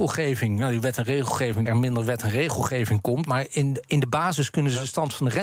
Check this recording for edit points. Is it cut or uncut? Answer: cut